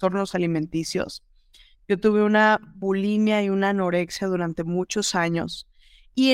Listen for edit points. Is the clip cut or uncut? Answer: uncut